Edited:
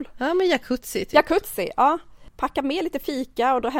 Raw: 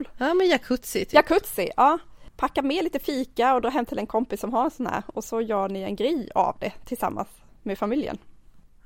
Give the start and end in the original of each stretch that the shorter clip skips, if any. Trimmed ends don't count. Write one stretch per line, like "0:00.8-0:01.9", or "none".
none